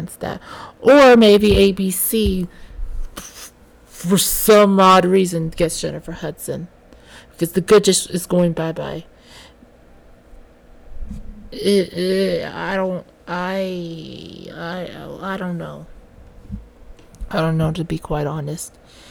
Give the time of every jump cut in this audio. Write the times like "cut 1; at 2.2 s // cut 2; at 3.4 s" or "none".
cut 1; at 14.5 s